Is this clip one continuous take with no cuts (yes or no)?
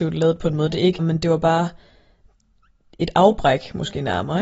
no